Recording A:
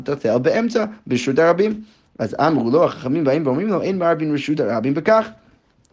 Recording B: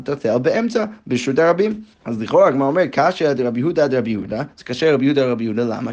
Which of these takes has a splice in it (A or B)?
B